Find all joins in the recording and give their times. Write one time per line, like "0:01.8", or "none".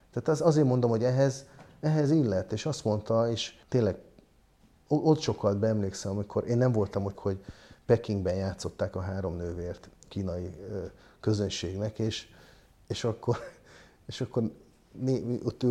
0:03.6
0:07.1